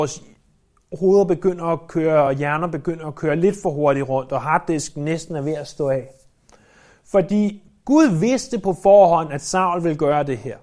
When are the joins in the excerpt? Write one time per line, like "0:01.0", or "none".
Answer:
none